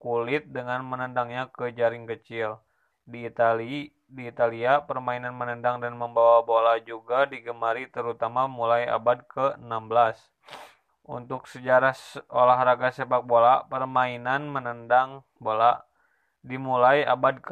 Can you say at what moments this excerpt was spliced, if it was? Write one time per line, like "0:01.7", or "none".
0:02.9
0:10.9